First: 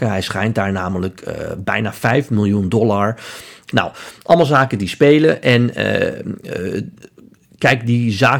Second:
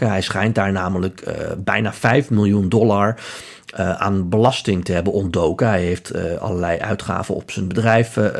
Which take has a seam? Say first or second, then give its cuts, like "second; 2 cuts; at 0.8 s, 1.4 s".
first; 1 cut; at 3.7 s